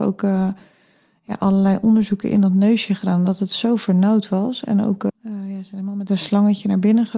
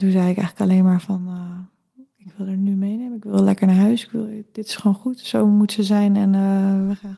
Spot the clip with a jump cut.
first; 1 cut; at 5.1 s

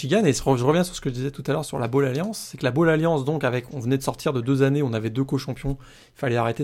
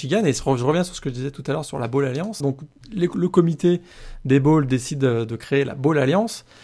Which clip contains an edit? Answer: second; 1 cut; at 2.4 s

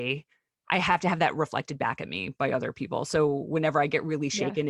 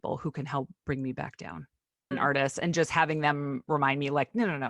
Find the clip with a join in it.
second; 1 cut; at 2.1 s

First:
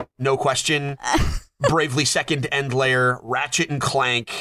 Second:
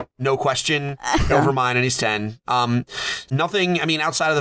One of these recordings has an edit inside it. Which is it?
second; 2 cuts; at 1.3 s, 3.3 s

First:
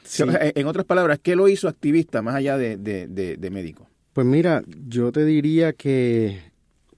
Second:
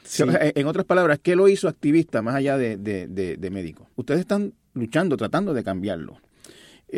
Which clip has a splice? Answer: second; 1 cut; at 3.9 s

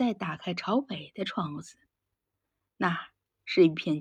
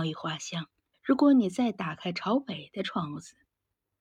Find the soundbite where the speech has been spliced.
second; 1 cut; at 0.9 s

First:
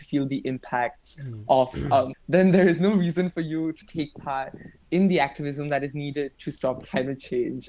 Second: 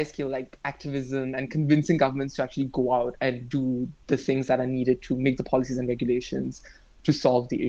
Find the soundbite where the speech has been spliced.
first; 2 cuts; at 2.1 s, 3.8 s

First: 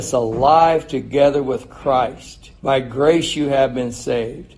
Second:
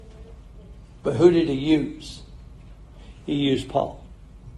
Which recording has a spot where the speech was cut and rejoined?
first; 1 cut; at 2.6 s

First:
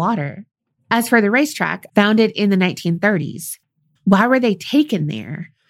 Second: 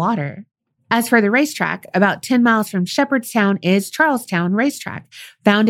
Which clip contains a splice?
first; 2 cuts; at 1.9 s, 4.0 s

